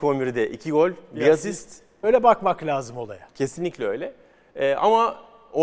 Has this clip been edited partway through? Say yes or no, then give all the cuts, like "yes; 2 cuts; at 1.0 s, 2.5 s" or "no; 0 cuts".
yes; 1 cut; at 2.0 s